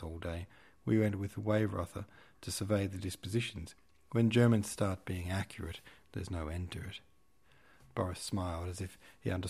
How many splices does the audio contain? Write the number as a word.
zero